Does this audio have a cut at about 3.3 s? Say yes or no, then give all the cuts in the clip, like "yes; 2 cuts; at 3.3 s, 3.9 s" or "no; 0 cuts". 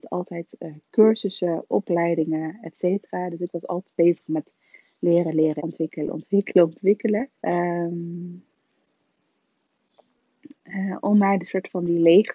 no; 2 cuts; at 5.6 s, 7.3 s